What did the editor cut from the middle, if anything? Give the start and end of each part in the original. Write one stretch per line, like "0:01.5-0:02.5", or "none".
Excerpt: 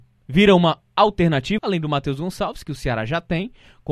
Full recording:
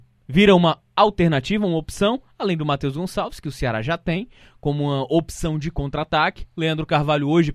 0:01.6-0:02.3

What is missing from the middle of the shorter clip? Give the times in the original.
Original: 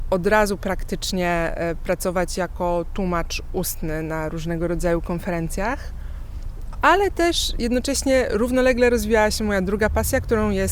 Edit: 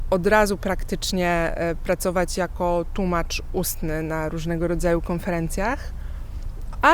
none

